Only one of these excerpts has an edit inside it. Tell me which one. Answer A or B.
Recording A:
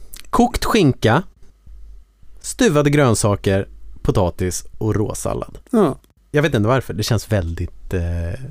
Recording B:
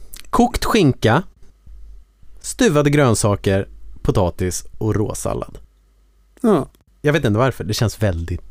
A